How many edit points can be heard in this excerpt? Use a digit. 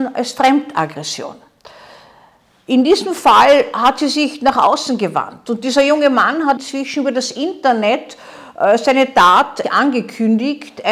2